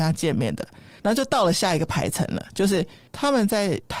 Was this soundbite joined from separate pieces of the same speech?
no; 0 cuts

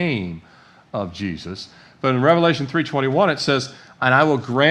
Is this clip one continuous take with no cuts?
yes; 0 cuts

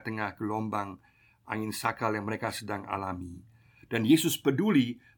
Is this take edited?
no; 0 cuts

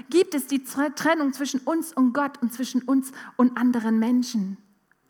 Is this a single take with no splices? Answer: yes; 0 cuts

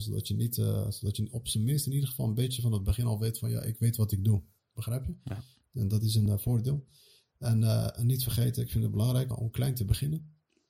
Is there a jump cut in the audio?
yes; 2 cuts; at 6.3 s, 9.3 s

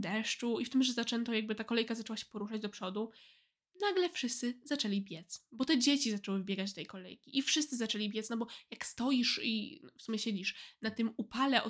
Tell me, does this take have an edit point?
no; 0 cuts

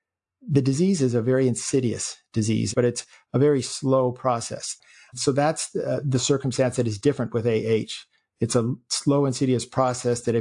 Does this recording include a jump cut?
yes; 1 cut; at 2.7 s

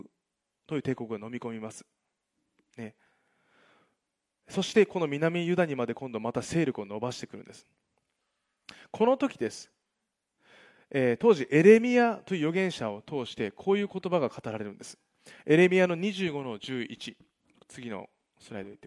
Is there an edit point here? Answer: no; 0 cuts

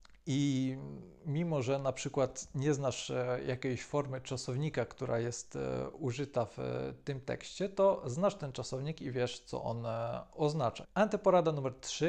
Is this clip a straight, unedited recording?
no; 1 cut; at 10.8 s

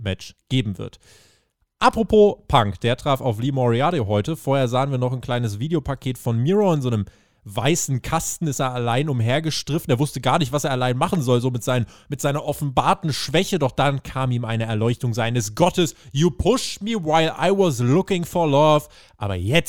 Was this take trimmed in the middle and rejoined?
no; 0 cuts

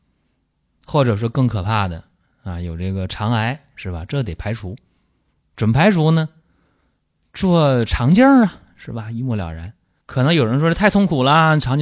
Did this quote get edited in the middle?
no; 0 cuts

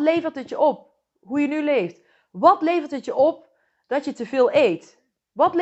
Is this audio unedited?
yes; 0 cuts

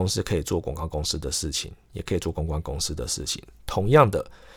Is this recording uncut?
yes; 0 cuts

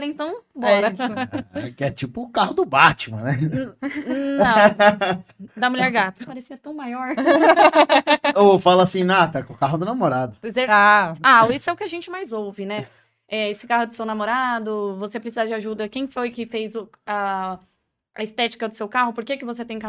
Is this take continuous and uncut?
no; 1 cut; at 6.3 s

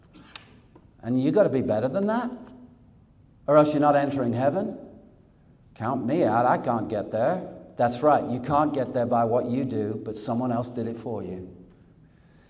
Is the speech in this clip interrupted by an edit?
no; 0 cuts

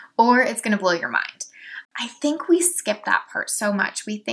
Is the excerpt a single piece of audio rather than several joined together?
no; 1 cut; at 1.8 s

